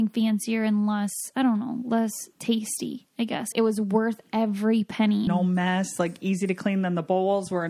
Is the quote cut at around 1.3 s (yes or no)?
no